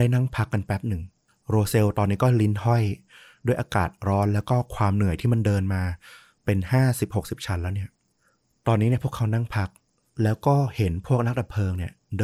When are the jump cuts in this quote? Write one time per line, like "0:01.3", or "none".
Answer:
none